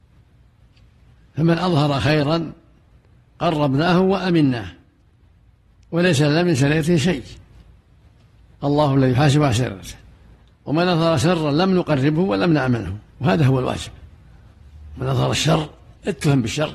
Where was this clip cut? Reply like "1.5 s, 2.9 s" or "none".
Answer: 13.1 s